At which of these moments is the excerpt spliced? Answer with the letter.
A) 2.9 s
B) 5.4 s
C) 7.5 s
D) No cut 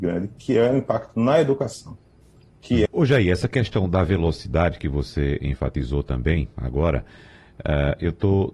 A